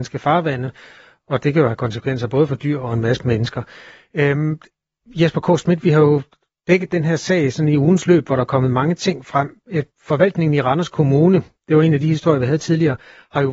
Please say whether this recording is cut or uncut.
uncut